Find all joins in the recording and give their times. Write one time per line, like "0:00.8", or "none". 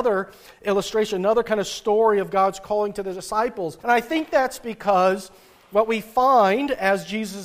0:03.8

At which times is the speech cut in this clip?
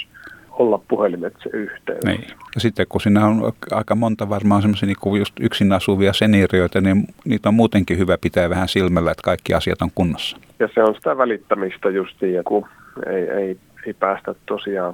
0:10.5
0:12.4

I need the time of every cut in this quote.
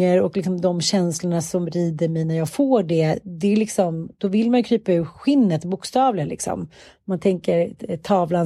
none

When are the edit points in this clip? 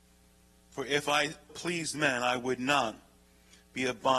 0:01.5

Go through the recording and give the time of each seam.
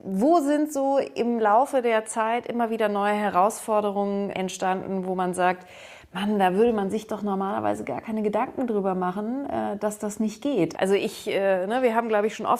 0:04.3
0:10.7

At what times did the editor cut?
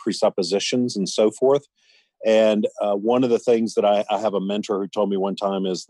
none

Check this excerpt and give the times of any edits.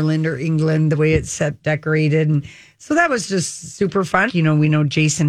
0:04.3

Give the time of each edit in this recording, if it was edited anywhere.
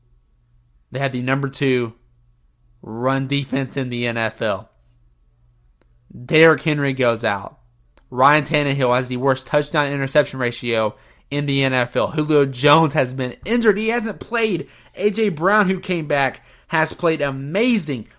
none

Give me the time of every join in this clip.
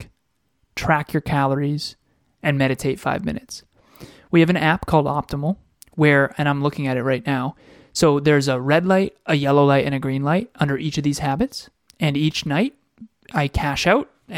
none

